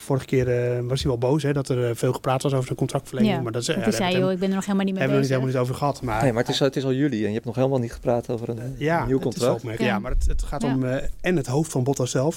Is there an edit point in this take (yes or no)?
yes